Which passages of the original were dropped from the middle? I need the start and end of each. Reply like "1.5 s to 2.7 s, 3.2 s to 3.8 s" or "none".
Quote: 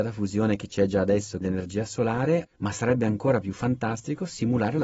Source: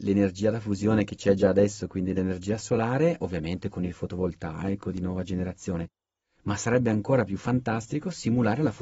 1.9 s to 2.1 s, 3.2 s to 6.3 s